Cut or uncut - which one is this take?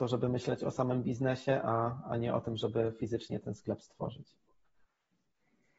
uncut